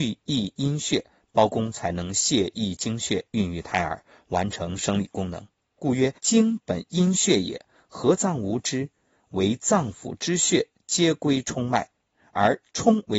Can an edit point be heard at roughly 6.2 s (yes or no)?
yes